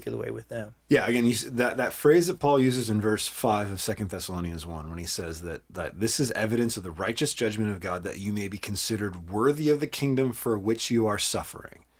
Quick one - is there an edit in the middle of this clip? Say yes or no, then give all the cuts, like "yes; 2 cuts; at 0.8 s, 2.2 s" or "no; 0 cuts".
no; 0 cuts